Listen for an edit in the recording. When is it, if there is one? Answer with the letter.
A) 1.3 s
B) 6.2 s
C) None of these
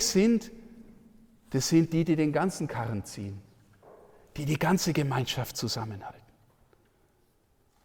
C